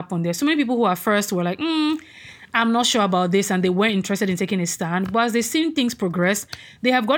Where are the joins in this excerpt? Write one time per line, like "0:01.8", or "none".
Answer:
none